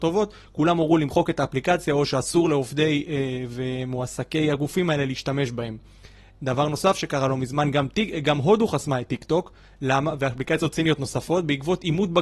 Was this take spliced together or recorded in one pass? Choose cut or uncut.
uncut